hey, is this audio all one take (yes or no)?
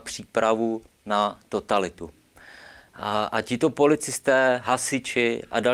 yes